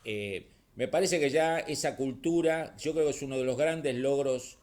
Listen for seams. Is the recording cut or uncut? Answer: uncut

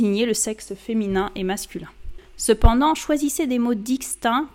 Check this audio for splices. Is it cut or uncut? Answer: uncut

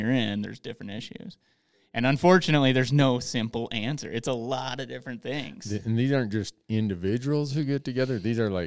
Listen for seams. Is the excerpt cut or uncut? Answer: uncut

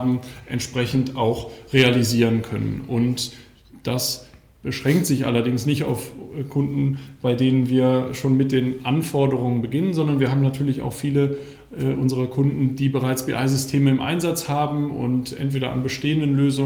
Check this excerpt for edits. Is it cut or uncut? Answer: uncut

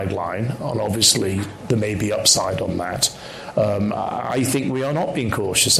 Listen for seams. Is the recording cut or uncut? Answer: uncut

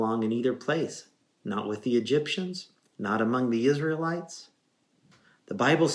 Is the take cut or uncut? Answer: uncut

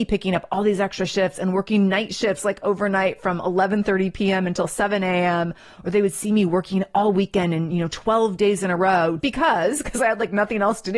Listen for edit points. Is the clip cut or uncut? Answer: cut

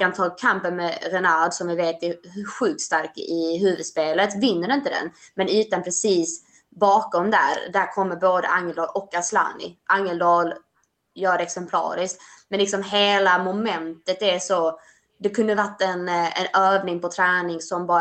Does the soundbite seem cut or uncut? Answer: uncut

